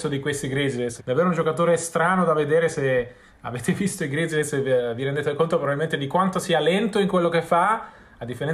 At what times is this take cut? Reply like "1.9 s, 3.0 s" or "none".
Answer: 1.0 s